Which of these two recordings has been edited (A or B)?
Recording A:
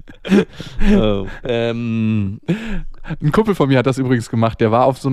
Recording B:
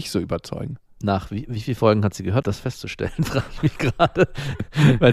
B